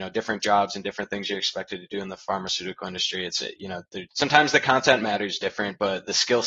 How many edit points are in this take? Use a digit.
1